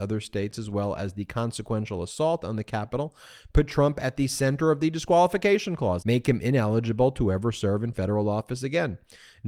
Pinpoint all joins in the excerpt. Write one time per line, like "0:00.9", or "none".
0:06.0